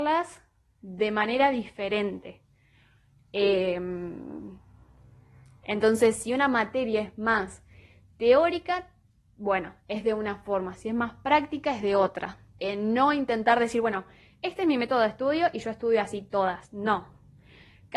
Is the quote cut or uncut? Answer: cut